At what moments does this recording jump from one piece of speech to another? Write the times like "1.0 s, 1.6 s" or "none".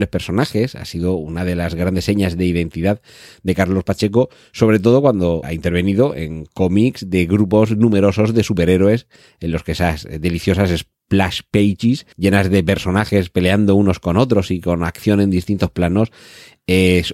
5.4 s, 12.1 s